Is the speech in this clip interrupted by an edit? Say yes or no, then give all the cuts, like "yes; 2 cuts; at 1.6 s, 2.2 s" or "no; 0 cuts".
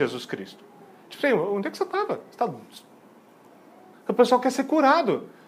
yes; 1 cut; at 3.9 s